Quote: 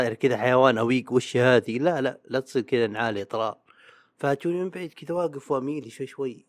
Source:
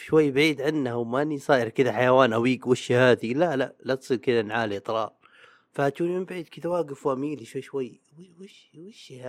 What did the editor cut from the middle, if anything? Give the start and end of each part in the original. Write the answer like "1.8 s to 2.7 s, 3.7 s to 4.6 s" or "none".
none

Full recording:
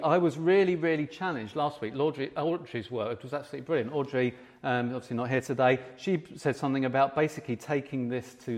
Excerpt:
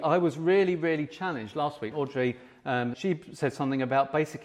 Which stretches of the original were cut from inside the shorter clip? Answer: 1.9 s to 3.9 s, 4.9 s to 6.0 s

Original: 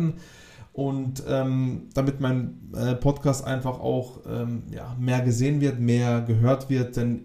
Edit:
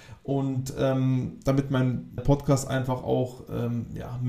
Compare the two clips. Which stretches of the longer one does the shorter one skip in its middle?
2.7 s to 2.9 s

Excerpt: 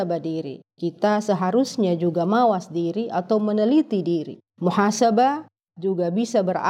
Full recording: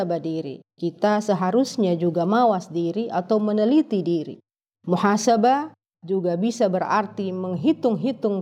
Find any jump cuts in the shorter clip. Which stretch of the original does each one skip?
4.5 s to 4.7 s

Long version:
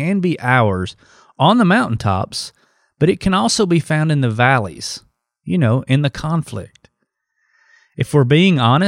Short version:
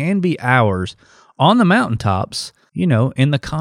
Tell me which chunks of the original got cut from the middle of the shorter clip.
2.7 s to 5.4 s

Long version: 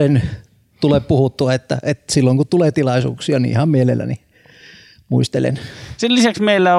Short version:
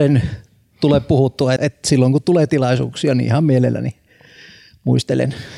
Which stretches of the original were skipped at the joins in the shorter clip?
1.6 s to 1.8 s

